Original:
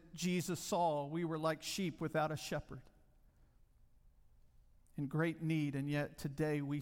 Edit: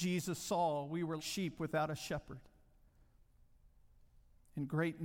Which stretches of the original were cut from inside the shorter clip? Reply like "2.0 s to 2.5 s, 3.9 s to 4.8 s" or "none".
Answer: 1.4 s to 1.6 s